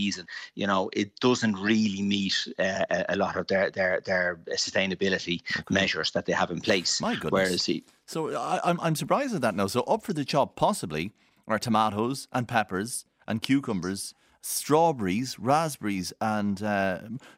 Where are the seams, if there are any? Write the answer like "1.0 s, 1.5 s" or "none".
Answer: none